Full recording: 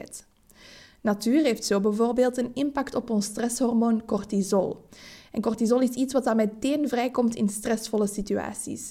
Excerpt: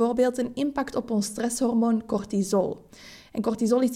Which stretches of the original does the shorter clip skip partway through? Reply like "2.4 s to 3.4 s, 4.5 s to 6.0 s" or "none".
none